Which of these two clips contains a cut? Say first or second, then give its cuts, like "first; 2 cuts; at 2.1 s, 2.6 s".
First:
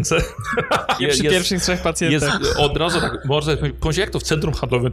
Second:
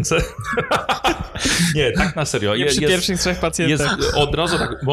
first; 1 cut; at 1.0 s